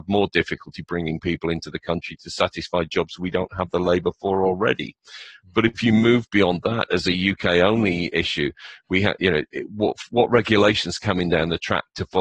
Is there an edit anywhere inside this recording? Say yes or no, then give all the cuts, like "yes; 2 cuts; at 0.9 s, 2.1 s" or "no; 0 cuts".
no; 0 cuts